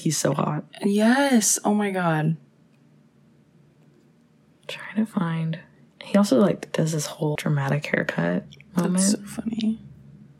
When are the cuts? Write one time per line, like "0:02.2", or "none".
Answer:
0:07.4